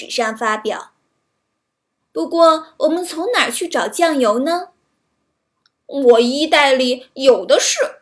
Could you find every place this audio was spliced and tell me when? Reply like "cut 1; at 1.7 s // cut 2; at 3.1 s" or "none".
cut 1; at 2.0 s